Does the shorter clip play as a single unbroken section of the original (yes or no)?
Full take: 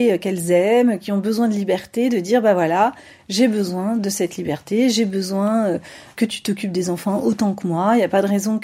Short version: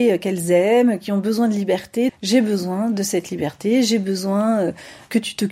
no